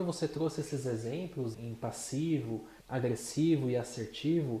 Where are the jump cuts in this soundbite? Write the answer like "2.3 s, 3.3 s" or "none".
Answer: 1.5 s, 2.8 s